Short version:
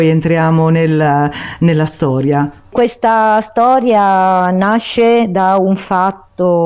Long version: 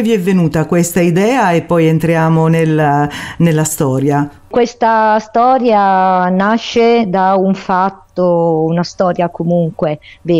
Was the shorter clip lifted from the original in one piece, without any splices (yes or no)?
yes